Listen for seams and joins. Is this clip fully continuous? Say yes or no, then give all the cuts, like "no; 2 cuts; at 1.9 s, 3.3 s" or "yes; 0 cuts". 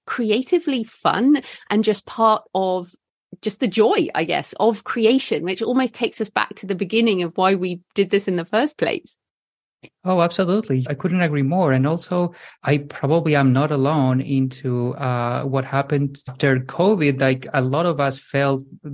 yes; 0 cuts